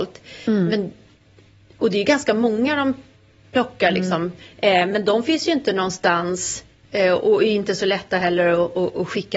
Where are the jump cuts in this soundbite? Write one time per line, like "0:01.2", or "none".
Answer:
none

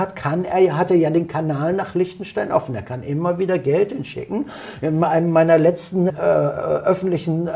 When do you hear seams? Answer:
0:06.1

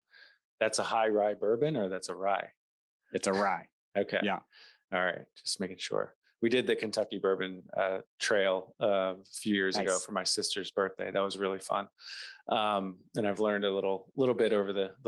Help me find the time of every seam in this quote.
none

